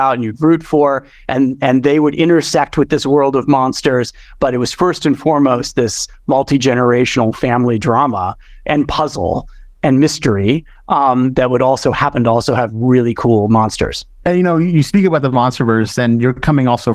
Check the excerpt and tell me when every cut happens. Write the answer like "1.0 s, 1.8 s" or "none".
14.2 s